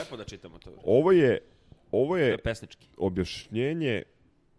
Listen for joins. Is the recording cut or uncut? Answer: uncut